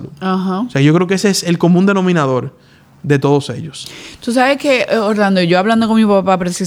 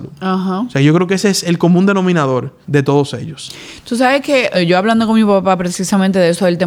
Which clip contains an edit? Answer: second; 2 cuts; at 2.6 s, 4.5 s

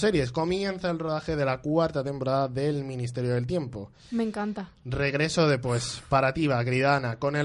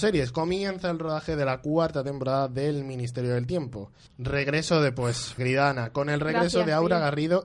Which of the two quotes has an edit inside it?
second; 2 cuts; at 4.1 s, 5.4 s

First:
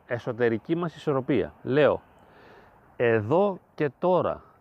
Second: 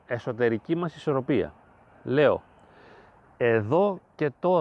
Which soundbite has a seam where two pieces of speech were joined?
first; 1 cut; at 1.6 s

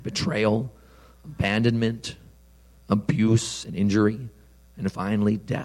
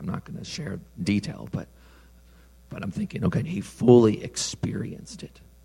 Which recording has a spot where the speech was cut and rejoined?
second; 1 cut; at 3.4 s

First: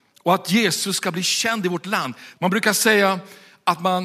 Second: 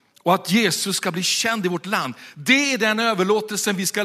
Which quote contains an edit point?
first; 1 cut; at 2.3 s

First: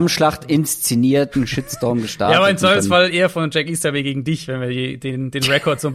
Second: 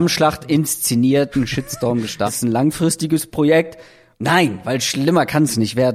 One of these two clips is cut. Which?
second; 2 cuts; at 2.3 s, 4.1 s

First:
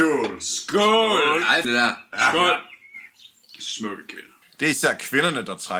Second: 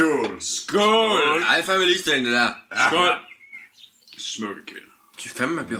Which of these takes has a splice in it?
first; 2 cuts; at 1.6 s, 4.4 s

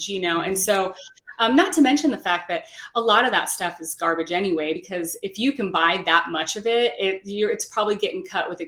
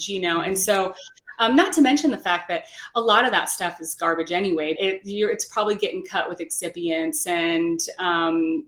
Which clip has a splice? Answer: second; 1 cut; at 4.8 s

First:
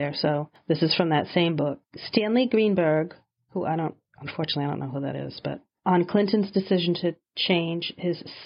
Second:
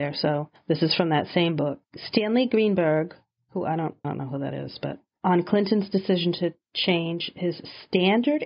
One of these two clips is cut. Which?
second; 1 cut; at 4.0 s

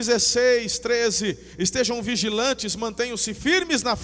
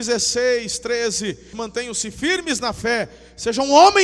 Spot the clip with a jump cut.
second; 1 cut; at 1.5 s

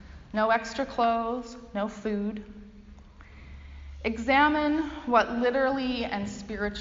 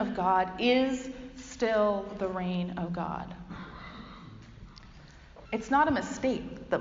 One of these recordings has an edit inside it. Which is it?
second; 1 cut; at 5.5 s

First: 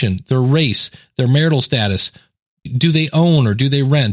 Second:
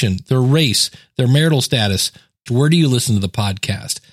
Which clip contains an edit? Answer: second; 1 cut; at 2.5 s

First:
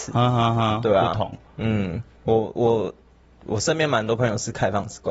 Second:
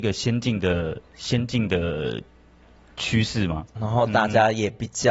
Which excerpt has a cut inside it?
second; 1 cut; at 3.7 s

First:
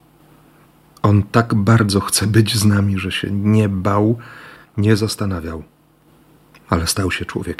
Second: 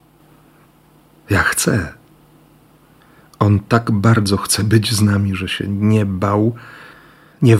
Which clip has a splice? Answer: first; 2 cuts; at 0.9 s, 4.6 s

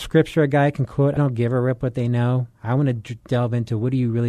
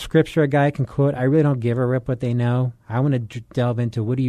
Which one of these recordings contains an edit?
first; 1 cut; at 1.2 s

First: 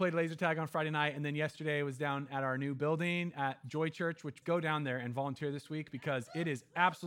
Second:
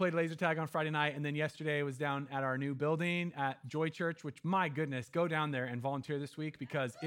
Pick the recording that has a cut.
first; 1 cut; at 4.4 s

